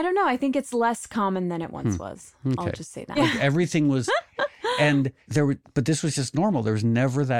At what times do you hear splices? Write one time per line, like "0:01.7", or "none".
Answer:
0:03.2